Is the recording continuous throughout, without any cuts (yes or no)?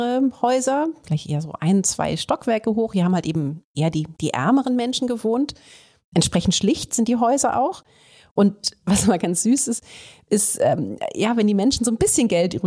yes